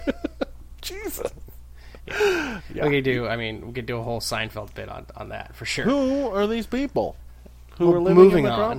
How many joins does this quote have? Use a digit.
0